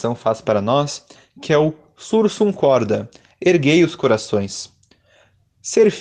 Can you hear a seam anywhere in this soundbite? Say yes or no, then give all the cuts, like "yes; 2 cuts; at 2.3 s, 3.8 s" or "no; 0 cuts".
no; 0 cuts